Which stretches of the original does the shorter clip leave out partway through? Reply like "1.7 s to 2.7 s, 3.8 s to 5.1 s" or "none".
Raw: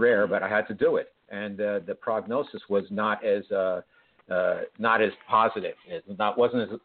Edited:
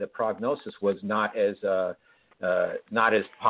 none